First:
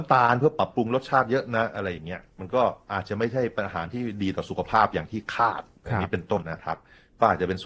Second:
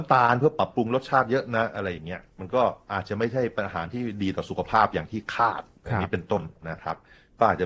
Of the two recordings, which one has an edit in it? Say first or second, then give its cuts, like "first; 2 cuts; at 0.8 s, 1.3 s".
first; 1 cut; at 6.4 s